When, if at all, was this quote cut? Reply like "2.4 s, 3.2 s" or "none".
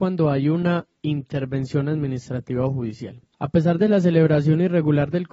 3.3 s

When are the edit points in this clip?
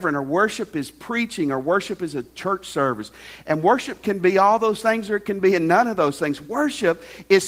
none

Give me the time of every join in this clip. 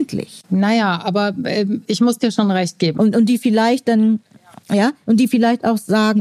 3.0 s

